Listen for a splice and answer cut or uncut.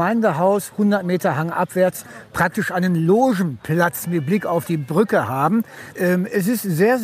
cut